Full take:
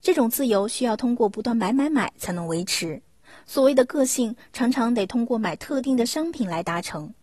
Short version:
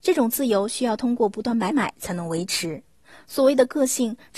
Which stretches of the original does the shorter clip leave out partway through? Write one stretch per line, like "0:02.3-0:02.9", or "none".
0:01.7-0:01.9